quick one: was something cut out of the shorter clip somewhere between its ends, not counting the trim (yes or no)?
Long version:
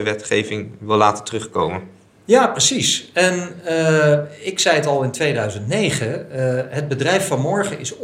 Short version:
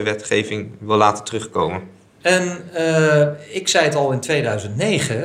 yes